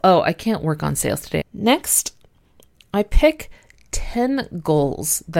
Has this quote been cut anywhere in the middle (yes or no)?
yes